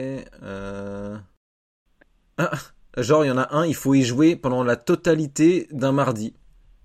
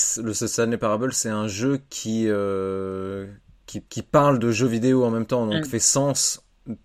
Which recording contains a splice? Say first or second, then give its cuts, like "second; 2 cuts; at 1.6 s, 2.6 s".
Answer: second; 2 cuts; at 3.9 s, 5.7 s